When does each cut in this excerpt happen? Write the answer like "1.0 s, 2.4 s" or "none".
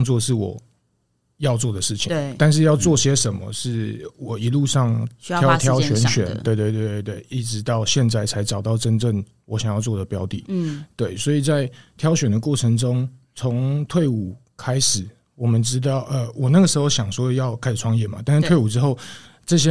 none